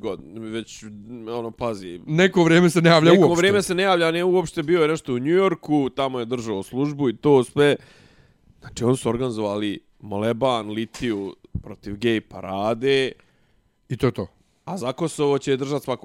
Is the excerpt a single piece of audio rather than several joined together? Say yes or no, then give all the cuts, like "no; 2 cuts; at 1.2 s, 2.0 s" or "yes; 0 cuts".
yes; 0 cuts